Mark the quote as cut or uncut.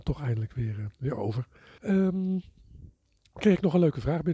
cut